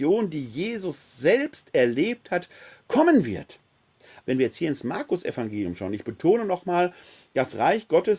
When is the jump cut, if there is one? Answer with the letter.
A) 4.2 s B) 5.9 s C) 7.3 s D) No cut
A